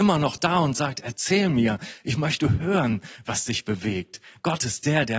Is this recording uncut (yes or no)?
yes